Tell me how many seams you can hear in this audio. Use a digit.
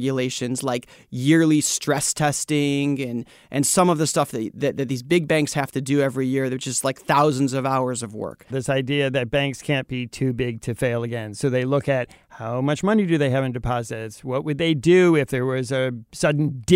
1